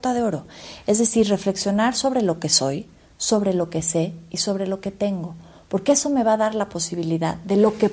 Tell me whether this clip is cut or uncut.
uncut